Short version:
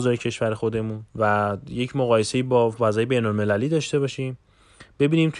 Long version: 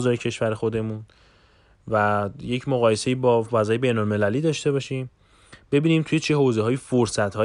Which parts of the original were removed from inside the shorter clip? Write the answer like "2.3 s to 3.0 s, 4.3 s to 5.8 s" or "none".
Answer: 1.1 s to 1.8 s